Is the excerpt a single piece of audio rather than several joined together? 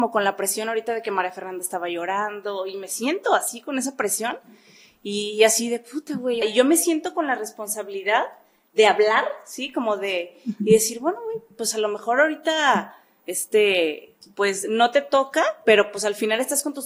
no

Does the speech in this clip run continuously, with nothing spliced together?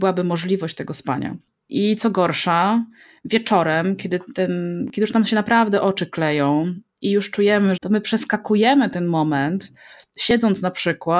no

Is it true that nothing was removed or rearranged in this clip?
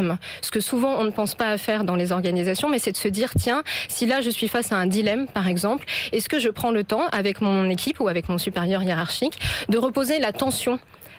yes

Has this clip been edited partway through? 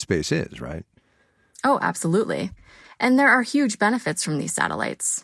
no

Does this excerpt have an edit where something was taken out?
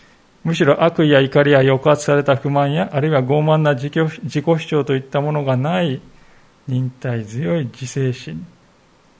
no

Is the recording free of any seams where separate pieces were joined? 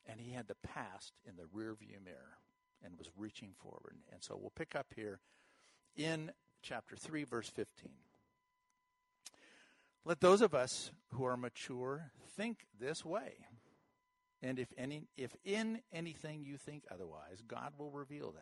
yes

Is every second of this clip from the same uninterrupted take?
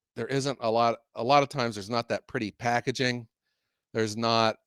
yes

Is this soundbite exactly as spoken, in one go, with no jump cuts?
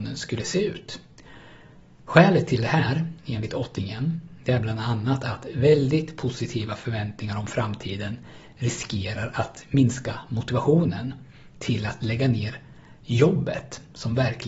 yes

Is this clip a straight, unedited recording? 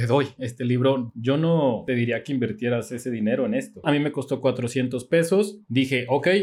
no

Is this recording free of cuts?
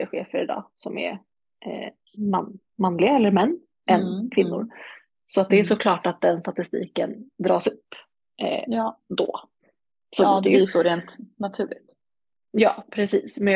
yes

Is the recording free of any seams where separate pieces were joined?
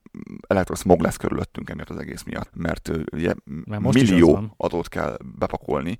no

